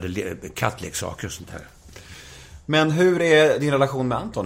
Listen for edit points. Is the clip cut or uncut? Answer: uncut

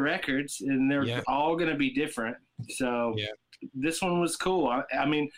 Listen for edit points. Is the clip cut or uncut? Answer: uncut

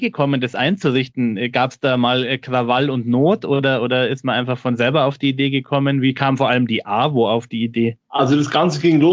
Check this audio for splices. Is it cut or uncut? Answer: uncut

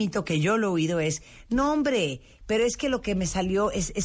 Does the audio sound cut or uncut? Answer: uncut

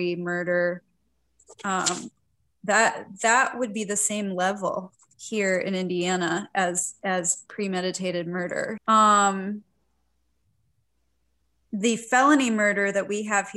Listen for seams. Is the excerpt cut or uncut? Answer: cut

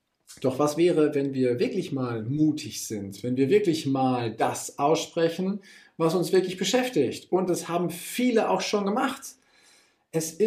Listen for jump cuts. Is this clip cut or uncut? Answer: uncut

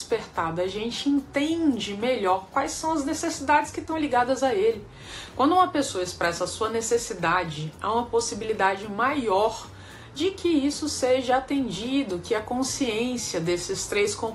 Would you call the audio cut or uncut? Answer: uncut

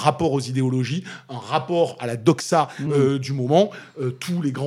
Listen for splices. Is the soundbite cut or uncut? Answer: uncut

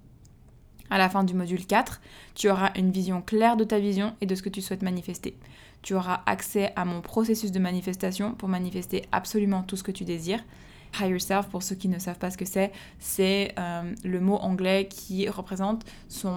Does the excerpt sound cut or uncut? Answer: cut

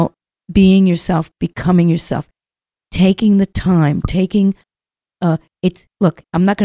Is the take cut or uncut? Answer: uncut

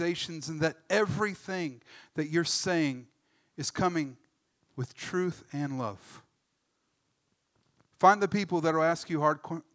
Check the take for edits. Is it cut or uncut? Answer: uncut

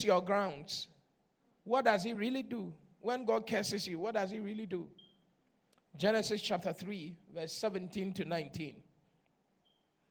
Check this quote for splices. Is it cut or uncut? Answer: uncut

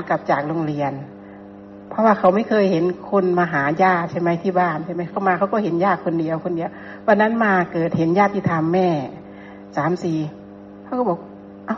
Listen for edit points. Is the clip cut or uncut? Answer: uncut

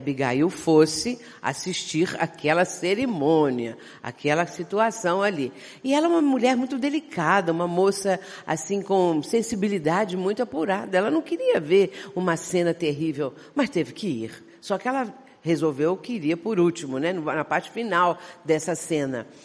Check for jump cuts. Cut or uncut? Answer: uncut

